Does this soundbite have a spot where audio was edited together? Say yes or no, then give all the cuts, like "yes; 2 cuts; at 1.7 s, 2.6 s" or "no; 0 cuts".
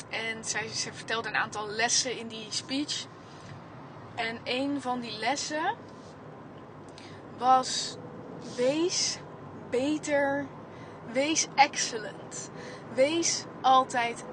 no; 0 cuts